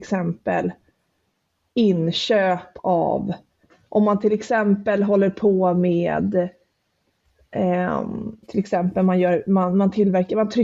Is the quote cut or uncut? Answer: cut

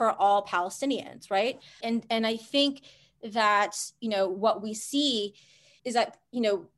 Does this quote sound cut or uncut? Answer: cut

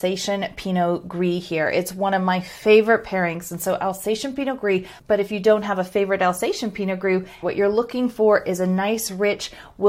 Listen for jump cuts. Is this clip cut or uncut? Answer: cut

